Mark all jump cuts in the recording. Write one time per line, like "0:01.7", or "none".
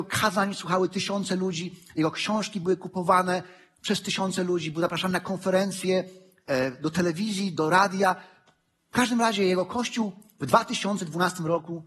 none